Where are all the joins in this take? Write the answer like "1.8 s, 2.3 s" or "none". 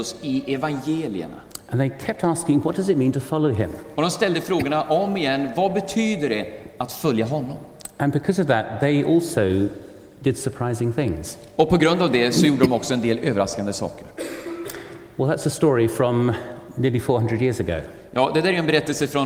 none